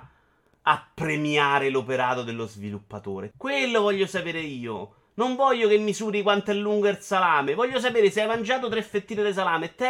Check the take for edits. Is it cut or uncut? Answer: cut